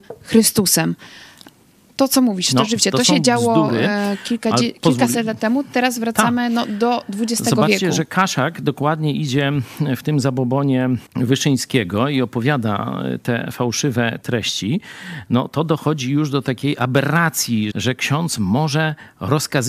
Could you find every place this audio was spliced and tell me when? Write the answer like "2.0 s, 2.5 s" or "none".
11.1 s, 17.7 s